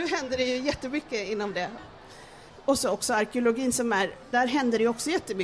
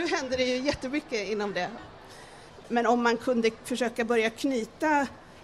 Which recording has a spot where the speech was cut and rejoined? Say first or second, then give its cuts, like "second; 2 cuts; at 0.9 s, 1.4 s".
second; 1 cut; at 2.6 s